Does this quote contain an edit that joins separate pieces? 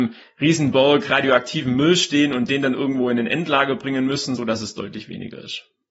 yes; 1 cut; at 4.4 s

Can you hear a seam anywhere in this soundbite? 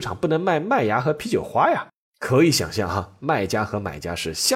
yes; 1 cut; at 2.1 s

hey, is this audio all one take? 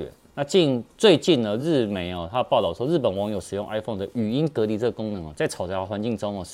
yes; 0 cuts

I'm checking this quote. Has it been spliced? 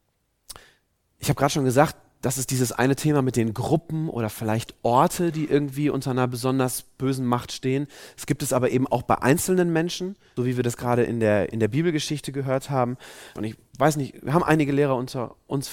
yes; 2 cuts; at 10.4 s, 13.4 s

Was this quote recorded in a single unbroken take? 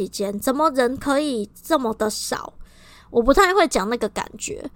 no; 1 cut; at 3.0 s

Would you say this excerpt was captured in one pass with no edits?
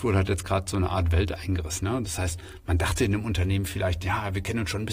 yes; 0 cuts

